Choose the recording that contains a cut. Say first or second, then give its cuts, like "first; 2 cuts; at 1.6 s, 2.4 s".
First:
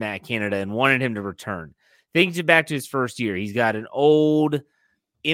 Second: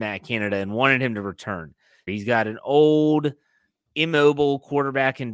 second; 1 cut; at 2.1 s